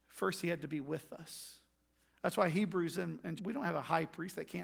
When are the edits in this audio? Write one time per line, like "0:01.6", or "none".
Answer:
0:03.4